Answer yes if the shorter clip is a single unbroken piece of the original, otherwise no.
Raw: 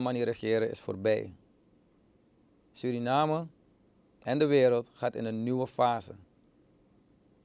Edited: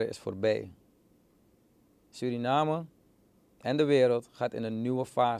yes